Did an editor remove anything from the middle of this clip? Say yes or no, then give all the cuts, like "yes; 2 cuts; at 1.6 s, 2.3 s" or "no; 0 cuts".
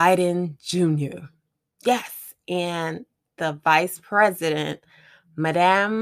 no; 0 cuts